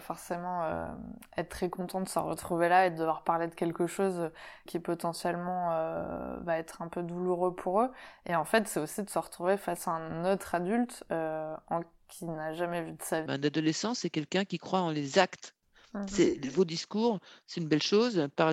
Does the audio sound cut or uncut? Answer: cut